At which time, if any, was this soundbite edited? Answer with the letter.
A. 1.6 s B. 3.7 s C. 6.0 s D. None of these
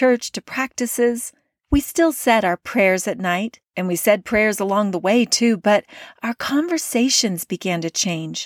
D